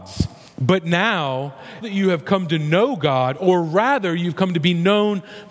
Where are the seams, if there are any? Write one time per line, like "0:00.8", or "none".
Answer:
0:01.8